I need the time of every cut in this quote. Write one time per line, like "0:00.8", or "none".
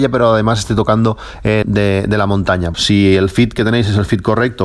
0:01.6
0:02.7

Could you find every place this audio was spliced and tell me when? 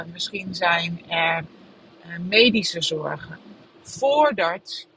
0:03.6

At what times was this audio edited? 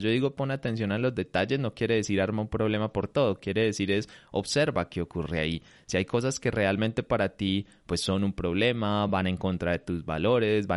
none

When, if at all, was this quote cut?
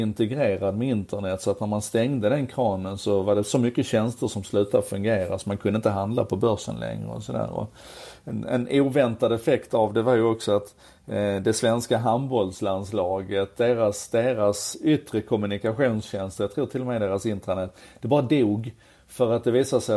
none

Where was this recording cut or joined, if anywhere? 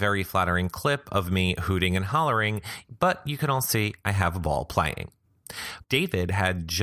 0:05.8

